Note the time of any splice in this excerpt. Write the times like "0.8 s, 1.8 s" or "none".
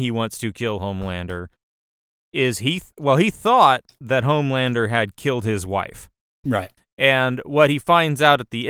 none